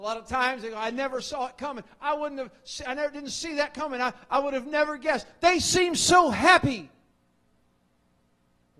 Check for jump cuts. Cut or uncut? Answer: uncut